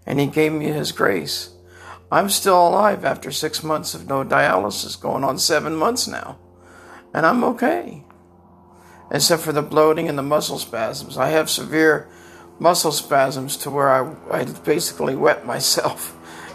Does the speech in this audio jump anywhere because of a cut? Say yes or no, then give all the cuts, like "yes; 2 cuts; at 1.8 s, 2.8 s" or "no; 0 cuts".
no; 0 cuts